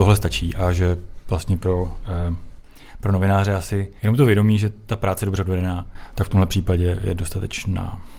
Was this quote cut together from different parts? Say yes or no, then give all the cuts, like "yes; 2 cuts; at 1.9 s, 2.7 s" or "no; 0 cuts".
yes; 1 cut; at 4.0 s